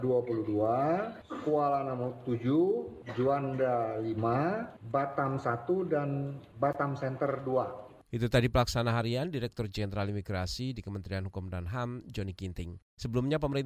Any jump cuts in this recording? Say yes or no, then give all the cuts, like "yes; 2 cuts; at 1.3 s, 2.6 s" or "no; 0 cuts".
no; 0 cuts